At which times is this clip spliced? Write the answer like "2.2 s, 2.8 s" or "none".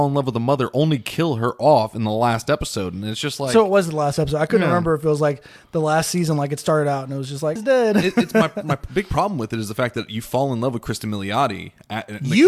7.6 s